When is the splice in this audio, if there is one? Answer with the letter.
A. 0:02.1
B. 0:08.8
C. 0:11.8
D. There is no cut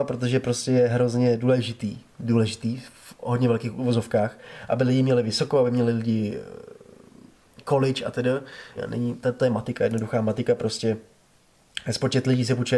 B